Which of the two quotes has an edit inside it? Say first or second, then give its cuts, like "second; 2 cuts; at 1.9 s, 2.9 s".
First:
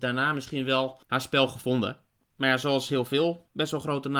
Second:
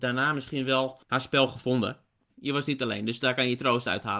second; 1 cut; at 2.3 s